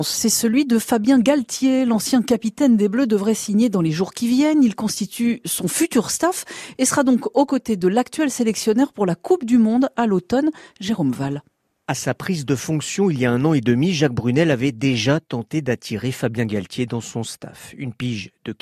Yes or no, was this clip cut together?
no